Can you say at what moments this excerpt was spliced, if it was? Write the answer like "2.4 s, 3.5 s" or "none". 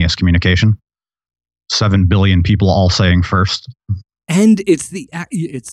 none